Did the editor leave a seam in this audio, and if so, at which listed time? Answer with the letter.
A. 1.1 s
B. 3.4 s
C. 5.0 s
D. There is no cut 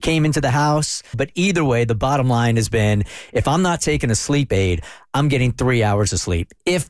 A